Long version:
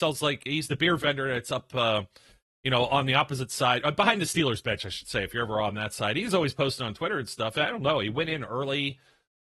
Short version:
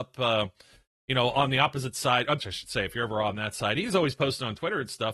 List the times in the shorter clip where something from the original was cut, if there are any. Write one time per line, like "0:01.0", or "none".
0:02.4